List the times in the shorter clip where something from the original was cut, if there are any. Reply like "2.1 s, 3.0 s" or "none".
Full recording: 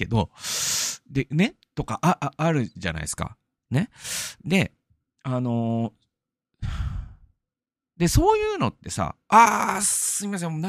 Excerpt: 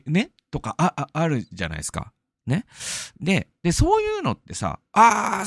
3.6 s